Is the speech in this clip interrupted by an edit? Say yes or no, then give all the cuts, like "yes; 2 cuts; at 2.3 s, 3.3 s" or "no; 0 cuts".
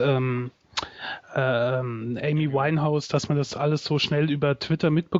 no; 0 cuts